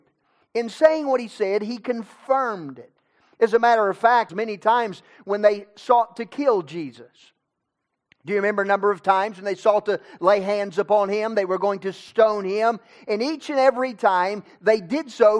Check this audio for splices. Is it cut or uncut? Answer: cut